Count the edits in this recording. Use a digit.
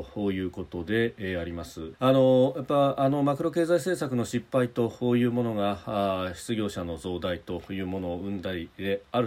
1